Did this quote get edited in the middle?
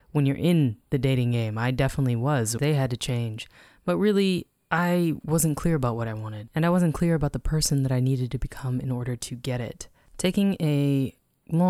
yes; 1 cut; at 2.6 s

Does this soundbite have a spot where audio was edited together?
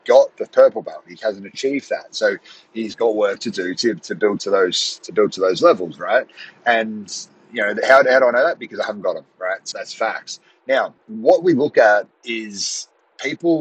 yes; 3 cuts; at 9.7 s, 11.0 s, 12.1 s

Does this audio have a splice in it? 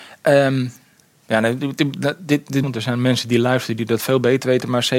yes; 1 cut; at 2.6 s

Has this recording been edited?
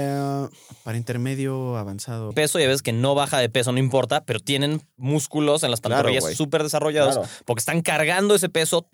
yes; 1 cut; at 2.3 s

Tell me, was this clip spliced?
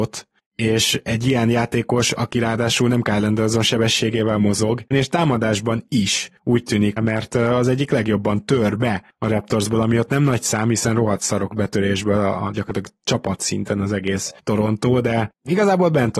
yes; 2 cuts; at 4.9 s, 7.0 s

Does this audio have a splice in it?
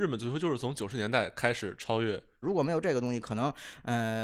yes; 1 cut; at 2.4 s

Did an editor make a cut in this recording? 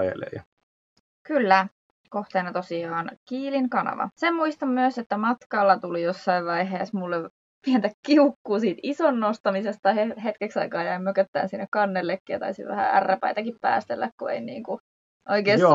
yes; 1 cut; at 4.1 s

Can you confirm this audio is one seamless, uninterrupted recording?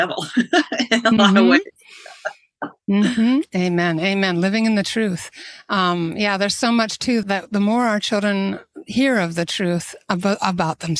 no; 1 cut; at 7.2 s

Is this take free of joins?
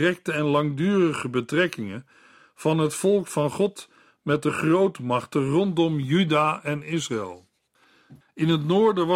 no; 1 cut; at 8.2 s

